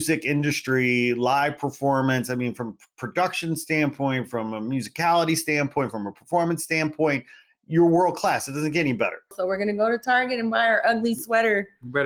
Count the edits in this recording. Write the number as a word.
one